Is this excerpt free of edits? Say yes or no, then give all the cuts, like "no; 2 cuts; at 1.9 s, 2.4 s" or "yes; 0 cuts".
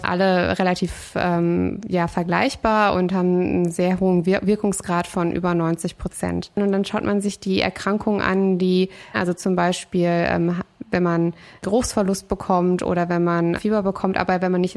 no; 2 cuts; at 9.1 s, 13.5 s